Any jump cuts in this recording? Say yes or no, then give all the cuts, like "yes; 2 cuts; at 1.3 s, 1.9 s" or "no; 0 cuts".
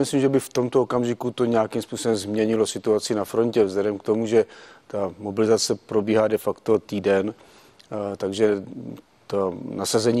no; 0 cuts